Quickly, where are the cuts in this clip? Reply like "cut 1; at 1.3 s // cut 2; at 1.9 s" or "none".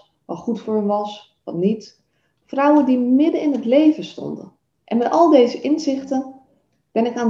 cut 1; at 2.4 s // cut 2; at 4.7 s